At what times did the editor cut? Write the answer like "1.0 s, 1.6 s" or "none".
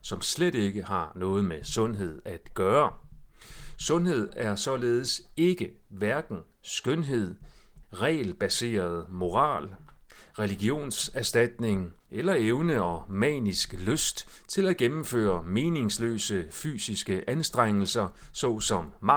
7.8 s, 12.0 s